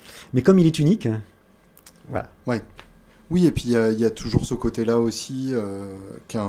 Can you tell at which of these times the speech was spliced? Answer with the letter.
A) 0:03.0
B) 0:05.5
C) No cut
C